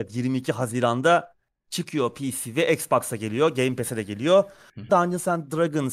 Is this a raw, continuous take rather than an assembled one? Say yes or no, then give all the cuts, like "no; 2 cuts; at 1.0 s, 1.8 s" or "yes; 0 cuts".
no; 1 cut; at 4.9 s